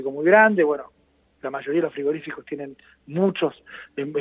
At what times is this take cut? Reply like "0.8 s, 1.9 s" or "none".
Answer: none